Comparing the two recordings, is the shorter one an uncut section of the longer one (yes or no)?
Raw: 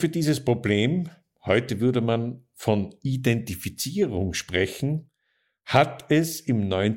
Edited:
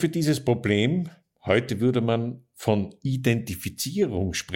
yes